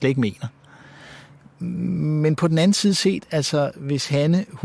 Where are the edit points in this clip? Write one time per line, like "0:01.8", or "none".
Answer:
none